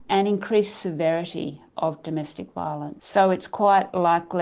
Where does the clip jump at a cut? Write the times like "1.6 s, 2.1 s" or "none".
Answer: 3.0 s